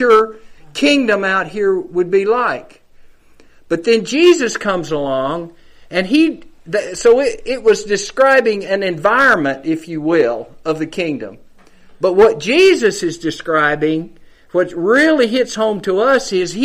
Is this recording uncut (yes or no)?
yes